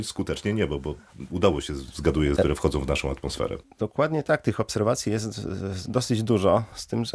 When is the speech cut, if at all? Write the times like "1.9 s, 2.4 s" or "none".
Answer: 2.4 s